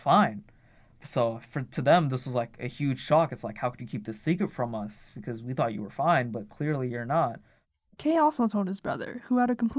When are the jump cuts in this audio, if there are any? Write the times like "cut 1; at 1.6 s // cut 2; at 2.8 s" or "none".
none